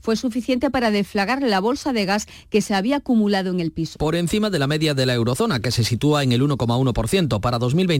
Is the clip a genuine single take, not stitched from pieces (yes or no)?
no